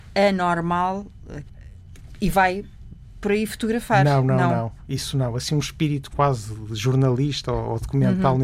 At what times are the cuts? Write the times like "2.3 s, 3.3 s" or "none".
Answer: none